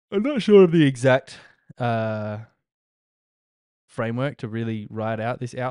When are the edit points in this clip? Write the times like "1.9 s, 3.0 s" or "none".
3.9 s